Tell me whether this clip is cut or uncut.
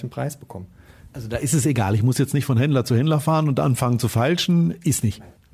uncut